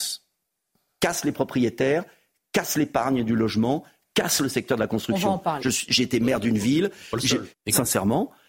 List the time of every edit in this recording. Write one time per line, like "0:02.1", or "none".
0:05.6
0:07.5